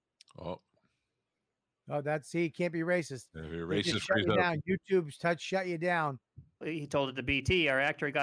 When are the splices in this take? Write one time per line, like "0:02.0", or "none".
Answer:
0:06.6